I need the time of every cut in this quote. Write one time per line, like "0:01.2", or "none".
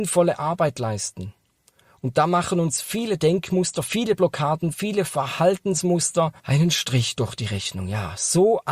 0:06.4